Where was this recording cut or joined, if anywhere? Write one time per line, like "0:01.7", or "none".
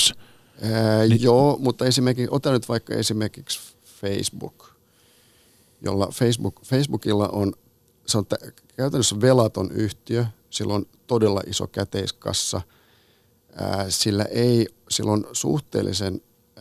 none